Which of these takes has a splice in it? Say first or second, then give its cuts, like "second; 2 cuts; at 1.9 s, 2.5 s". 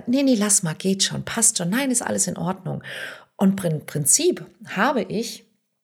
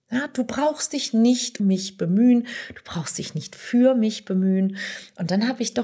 second; 1 cut; at 1.6 s